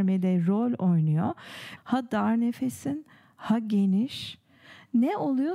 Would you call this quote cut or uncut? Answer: cut